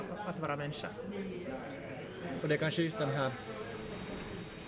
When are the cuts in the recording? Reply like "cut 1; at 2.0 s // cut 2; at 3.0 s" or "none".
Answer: cut 1; at 2.4 s